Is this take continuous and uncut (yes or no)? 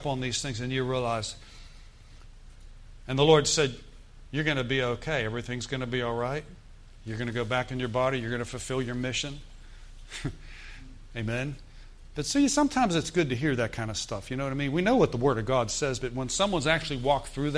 yes